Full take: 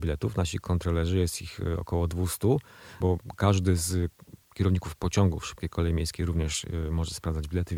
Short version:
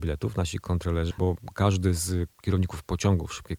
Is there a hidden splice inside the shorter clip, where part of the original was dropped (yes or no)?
yes